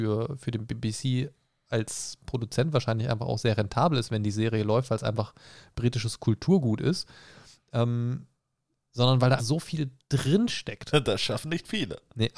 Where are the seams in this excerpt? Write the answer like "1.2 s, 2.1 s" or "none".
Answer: 9.4 s, 10.9 s